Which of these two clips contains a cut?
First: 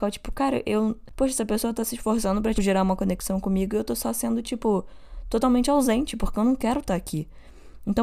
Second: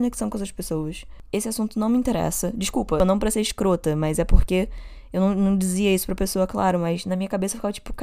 first; 1 cut; at 2.5 s

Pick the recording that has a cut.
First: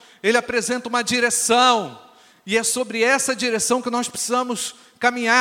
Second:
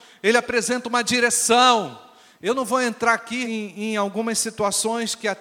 second; 2 cuts; at 2.4 s, 3.4 s

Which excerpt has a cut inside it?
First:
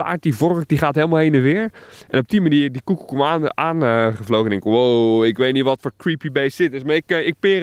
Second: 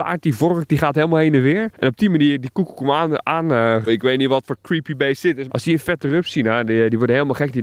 second; 3 cuts; at 1.7 s, 3.9 s, 5.5 s

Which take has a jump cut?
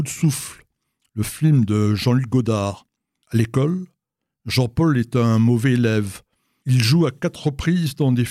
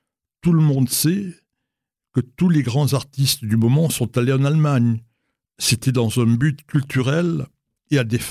first; 2 cuts; at 3.2 s, 6.6 s

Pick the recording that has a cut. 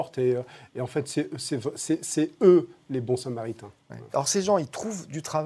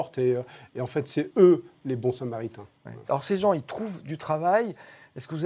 second; 1 cut; at 1.3 s

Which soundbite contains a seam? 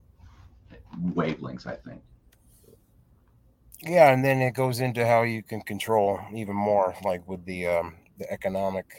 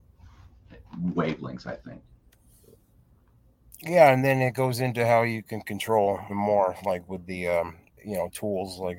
second; 2 cuts; at 6.3 s, 7.9 s

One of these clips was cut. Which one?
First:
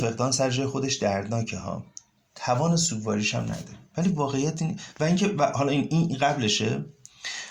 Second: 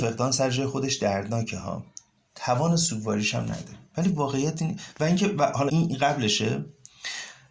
second; 1 cut; at 5.7 s

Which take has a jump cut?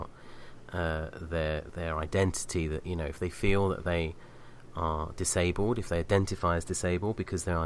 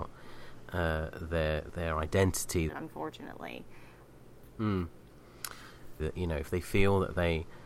second; 2 cuts; at 2.7 s, 6.0 s

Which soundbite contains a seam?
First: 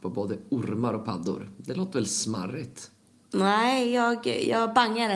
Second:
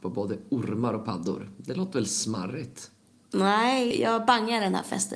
second; 1 cut; at 3.9 s

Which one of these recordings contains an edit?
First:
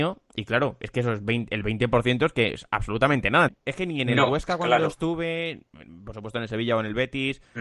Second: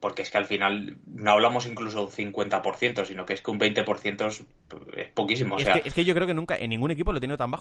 first; 1 cut; at 3.5 s

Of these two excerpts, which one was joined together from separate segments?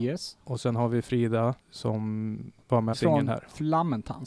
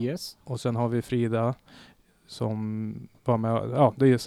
first; 2 cuts; at 1.6 s, 2.9 s

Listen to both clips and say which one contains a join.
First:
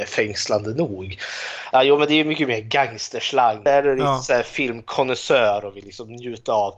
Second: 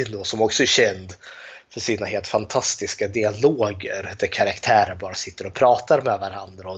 first; 2 cuts; at 1.7 s, 3.7 s

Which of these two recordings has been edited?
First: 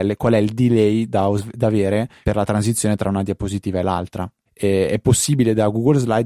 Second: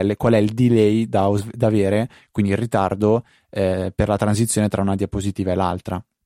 first; 2 cuts; at 2.2 s, 4.5 s

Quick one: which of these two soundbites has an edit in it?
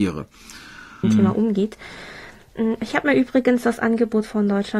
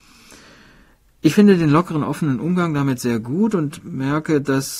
first; 1 cut; at 1.0 s

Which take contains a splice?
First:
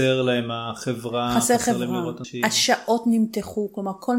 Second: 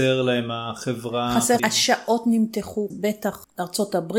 second; 2 cuts; at 1.6 s, 2.9 s

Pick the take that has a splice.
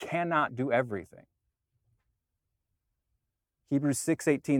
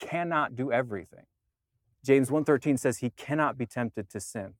second; 1 cut; at 1.9 s

